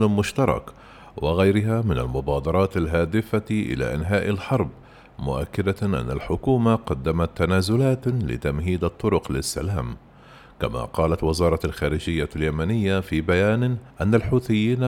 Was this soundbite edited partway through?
yes; 1 cut; at 13.9 s

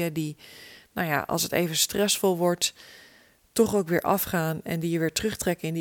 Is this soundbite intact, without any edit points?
yes; 0 cuts

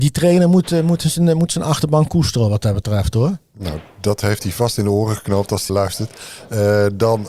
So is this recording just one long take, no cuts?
no; 1 cut; at 5.7 s

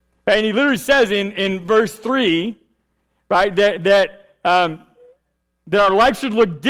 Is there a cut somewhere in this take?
no; 0 cuts

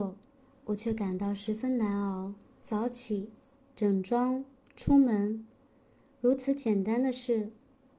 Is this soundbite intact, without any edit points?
no; 1 cut; at 2.6 s

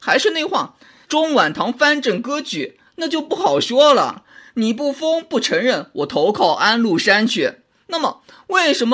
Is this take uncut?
no; 1 cut; at 1.0 s

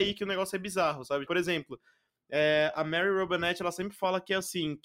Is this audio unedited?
no; 1 cut; at 1.3 s

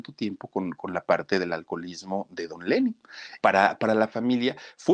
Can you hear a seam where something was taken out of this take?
yes; 1 cut; at 3.4 s

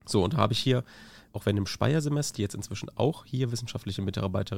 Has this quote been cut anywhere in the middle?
yes; 2 cuts; at 1.3 s, 2.3 s

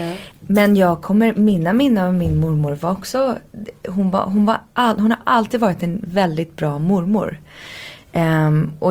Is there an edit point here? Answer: no; 0 cuts

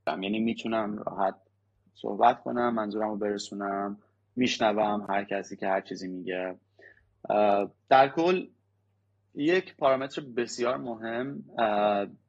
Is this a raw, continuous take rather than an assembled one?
no; 1 cut; at 7.8 s

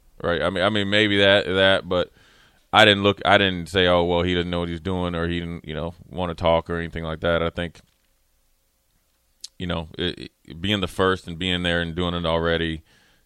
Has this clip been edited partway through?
no; 0 cuts

